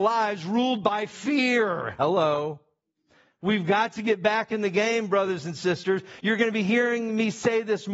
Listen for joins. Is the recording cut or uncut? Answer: uncut